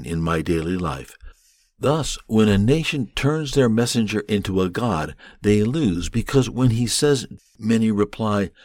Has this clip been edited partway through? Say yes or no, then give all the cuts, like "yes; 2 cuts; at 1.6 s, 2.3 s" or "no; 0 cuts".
yes; 1 cut; at 7.4 s